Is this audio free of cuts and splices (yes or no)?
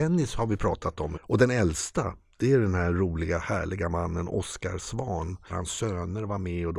no